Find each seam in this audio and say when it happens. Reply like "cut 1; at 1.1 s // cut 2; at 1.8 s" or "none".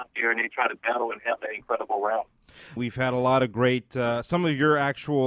cut 1; at 2.8 s